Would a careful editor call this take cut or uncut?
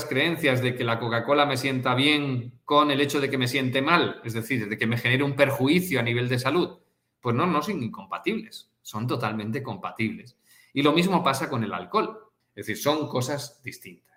cut